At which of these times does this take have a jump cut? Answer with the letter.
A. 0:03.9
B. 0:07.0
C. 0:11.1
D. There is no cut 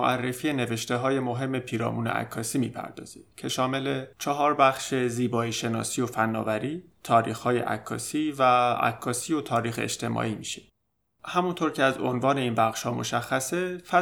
B